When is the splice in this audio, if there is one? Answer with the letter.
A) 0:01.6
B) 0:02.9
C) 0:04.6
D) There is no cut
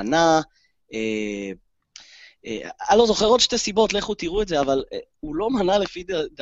D